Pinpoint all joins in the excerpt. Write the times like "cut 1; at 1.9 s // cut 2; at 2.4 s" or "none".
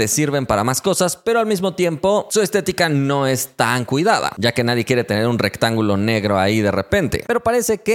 none